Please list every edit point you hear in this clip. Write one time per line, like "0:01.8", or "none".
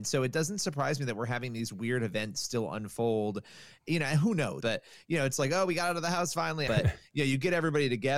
0:04.6
0:06.7